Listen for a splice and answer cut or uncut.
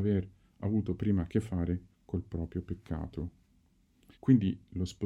cut